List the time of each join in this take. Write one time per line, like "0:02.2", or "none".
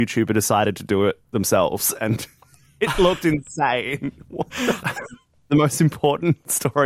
0:01.2
0:04.8